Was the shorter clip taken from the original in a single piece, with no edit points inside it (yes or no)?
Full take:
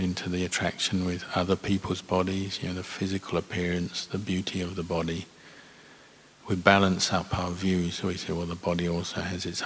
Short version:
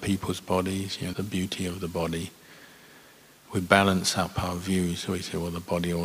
no